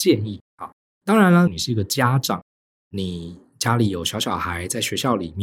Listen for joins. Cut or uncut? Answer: cut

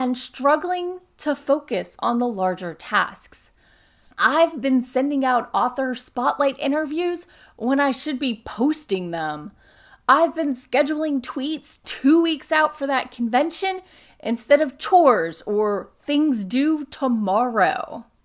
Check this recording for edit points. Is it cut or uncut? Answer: cut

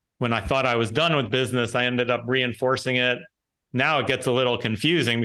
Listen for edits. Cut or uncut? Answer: uncut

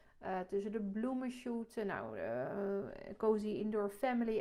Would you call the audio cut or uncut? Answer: uncut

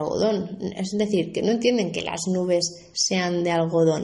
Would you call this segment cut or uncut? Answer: uncut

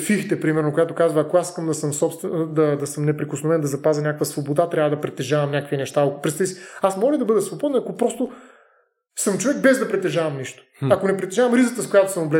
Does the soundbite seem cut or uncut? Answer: uncut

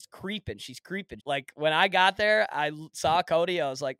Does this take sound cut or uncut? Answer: cut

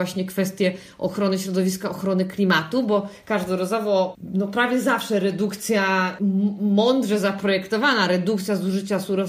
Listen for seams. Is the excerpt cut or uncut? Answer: uncut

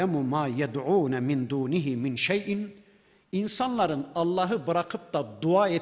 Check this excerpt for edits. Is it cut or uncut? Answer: uncut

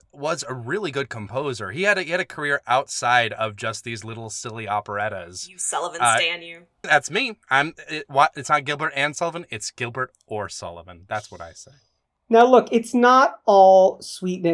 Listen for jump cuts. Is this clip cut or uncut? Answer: cut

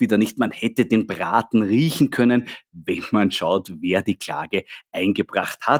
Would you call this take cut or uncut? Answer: uncut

